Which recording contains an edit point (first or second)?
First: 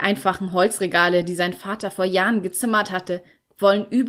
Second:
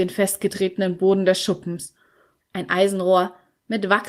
second